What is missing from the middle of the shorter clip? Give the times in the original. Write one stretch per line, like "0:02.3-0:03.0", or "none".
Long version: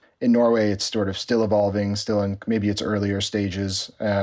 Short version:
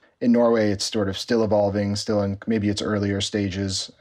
none